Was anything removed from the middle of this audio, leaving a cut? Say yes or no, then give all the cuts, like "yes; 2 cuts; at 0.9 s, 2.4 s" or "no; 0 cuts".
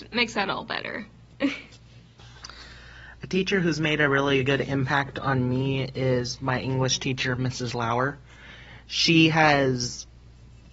no; 0 cuts